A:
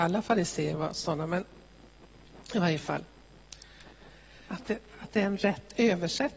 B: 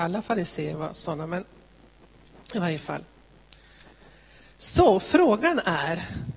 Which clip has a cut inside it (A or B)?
A